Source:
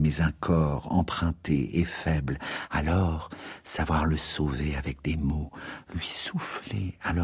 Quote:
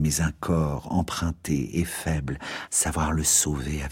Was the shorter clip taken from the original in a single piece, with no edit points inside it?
no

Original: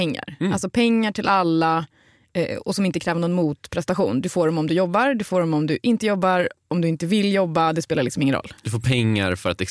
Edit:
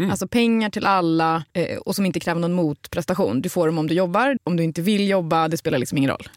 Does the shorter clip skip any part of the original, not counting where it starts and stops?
yes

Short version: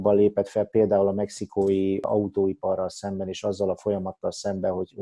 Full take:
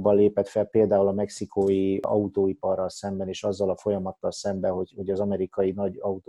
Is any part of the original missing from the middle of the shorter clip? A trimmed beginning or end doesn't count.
no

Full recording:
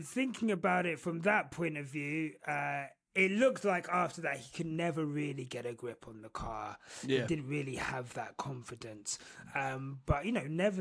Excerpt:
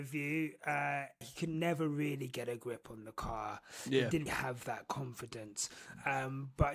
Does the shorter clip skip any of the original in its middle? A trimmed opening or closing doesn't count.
yes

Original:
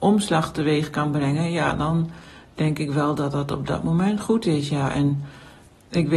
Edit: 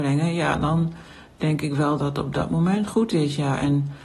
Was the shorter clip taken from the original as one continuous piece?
no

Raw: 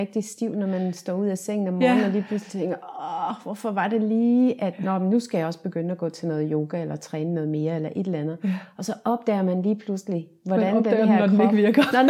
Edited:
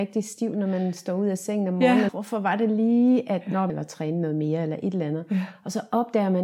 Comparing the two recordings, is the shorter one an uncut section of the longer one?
no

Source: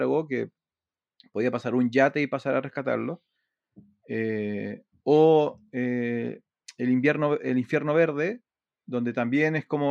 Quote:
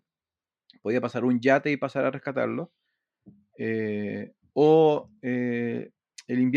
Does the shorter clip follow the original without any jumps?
yes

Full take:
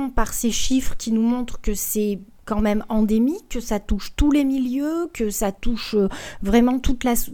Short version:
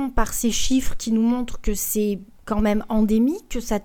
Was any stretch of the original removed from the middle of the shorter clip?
no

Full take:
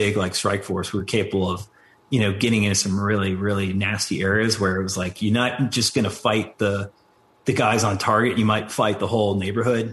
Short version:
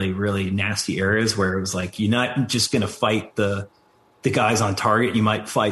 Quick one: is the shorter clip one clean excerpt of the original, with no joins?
yes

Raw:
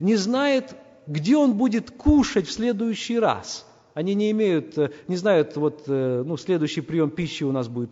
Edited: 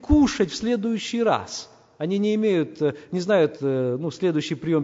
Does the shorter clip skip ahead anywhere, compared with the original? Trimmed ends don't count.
yes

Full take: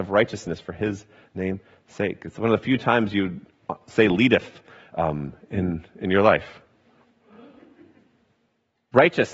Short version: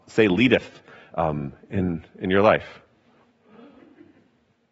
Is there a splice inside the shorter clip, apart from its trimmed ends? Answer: no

